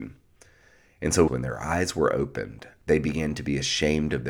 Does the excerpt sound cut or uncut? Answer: cut